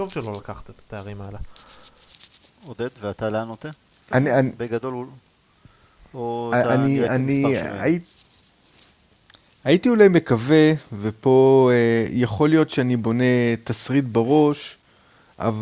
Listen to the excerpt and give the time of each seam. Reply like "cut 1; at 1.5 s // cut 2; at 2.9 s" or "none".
cut 1; at 4.1 s